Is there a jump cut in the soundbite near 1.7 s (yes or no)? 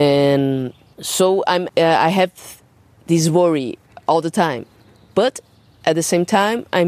yes